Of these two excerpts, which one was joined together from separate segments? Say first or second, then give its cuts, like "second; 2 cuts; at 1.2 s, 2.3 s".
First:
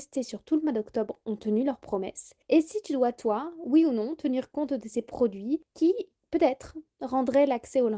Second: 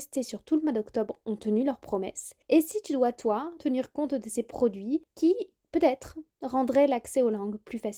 second; 1 cut; at 3.6 s